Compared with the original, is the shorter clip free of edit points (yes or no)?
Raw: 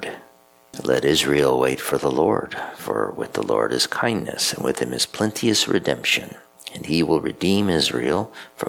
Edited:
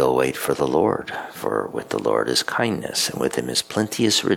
yes